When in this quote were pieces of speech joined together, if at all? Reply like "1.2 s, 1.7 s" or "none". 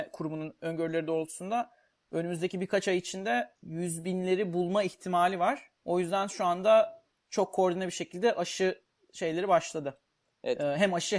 none